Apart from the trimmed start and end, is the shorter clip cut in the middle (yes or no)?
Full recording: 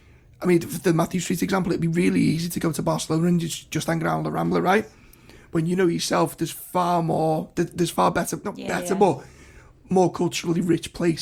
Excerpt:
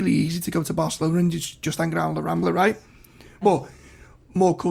yes